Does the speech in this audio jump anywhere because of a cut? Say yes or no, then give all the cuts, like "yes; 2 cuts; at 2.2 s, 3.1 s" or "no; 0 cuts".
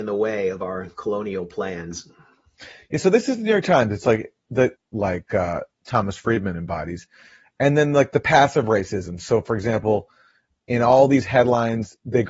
yes; 1 cut; at 4.8 s